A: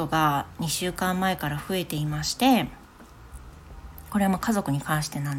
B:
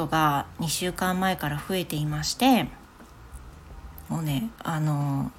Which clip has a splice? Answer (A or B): B